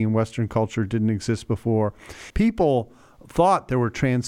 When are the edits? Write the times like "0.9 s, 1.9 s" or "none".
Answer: 2.3 s